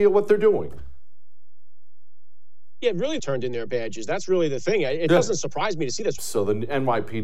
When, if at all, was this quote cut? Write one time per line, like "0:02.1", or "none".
0:03.2
0:06.2